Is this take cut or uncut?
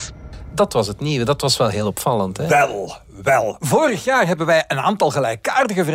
uncut